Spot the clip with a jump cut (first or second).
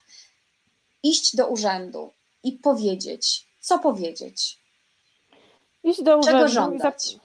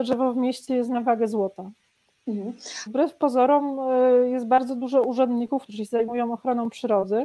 second